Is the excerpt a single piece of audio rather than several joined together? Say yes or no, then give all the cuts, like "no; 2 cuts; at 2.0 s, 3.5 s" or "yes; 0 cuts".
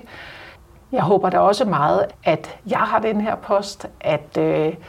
no; 1 cut; at 2.1 s